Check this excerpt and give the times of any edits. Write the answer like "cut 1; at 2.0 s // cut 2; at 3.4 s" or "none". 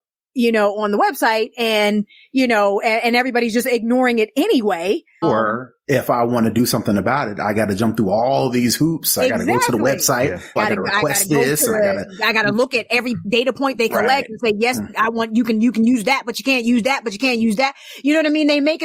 cut 1; at 5.2 s // cut 2; at 10.6 s